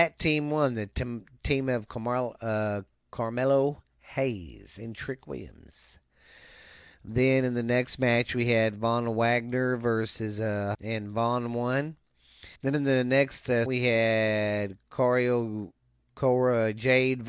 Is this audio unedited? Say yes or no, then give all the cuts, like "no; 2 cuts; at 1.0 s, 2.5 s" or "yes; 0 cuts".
no; 3 cuts; at 10.7 s, 12.6 s, 13.7 s